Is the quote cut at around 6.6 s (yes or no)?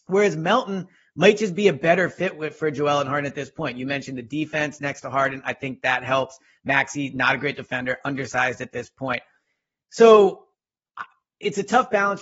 no